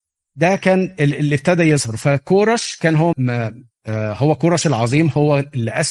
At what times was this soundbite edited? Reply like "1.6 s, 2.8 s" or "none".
3.1 s